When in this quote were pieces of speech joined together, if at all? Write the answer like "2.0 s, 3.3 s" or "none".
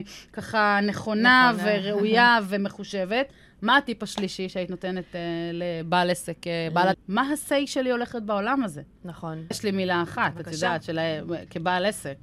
6.9 s, 9.5 s